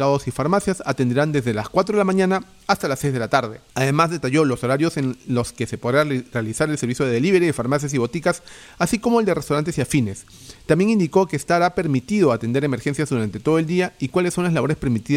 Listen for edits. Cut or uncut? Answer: cut